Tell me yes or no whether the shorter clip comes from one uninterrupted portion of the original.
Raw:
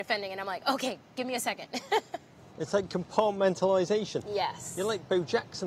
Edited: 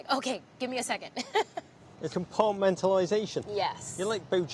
no